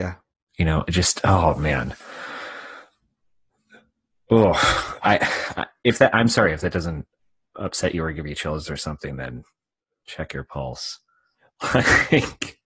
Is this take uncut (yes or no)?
yes